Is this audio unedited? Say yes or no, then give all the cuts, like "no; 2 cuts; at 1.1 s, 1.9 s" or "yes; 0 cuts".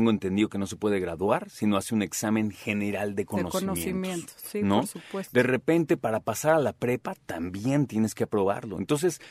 yes; 0 cuts